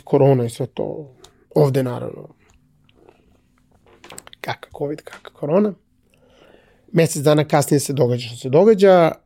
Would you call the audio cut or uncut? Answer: uncut